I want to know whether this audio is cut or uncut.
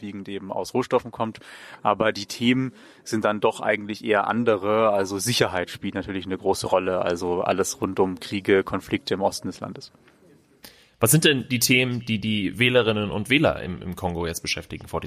uncut